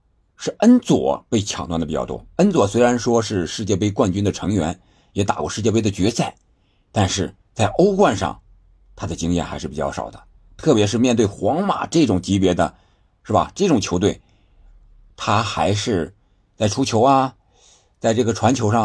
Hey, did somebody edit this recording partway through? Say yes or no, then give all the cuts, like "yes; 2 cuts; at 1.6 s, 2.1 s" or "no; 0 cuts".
no; 0 cuts